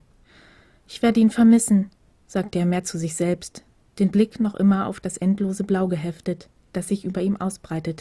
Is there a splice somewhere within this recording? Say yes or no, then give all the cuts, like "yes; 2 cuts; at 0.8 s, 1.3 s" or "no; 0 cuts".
no; 0 cuts